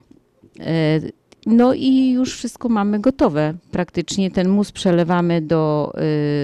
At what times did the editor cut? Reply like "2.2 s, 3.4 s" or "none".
none